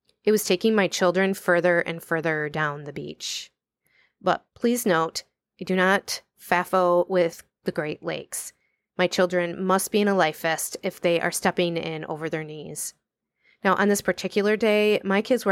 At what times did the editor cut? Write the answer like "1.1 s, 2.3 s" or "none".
none